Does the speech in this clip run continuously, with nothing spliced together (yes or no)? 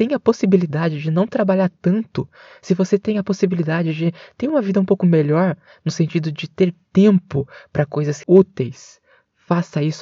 no